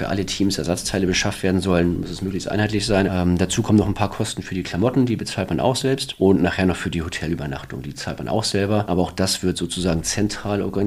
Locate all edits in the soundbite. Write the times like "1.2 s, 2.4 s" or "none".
3.1 s